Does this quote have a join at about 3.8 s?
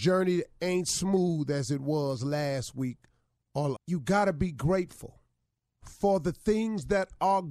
yes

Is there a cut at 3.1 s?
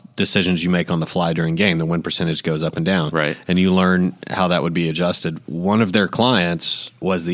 no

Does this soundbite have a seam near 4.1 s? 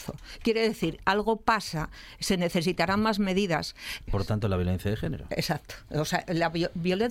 yes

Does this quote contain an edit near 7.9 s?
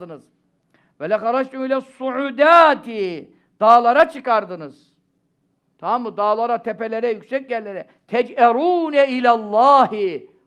no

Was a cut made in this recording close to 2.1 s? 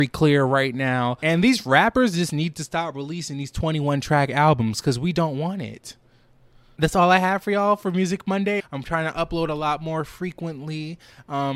no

